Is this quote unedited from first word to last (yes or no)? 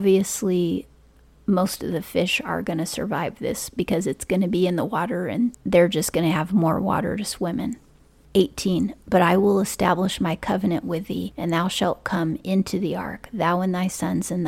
yes